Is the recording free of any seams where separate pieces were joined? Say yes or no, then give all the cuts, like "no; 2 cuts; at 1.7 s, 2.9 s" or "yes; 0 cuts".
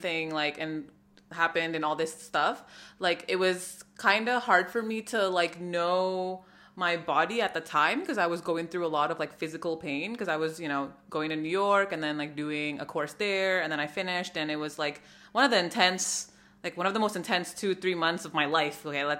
yes; 0 cuts